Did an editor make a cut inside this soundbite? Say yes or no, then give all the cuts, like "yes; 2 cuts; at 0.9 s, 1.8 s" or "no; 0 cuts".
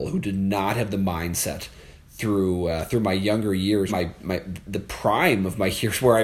yes; 1 cut; at 3.9 s